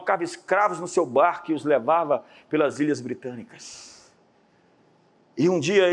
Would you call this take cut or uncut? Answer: uncut